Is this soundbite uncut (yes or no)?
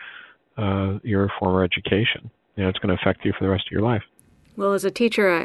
yes